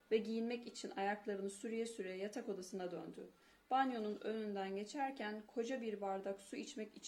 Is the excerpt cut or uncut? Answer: uncut